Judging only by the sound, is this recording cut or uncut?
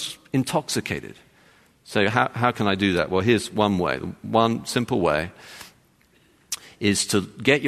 cut